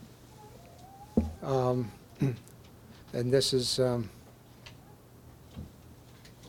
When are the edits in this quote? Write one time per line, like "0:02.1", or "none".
0:01.4
0:03.0